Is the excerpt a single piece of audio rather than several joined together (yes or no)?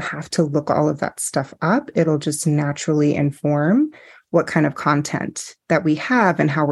no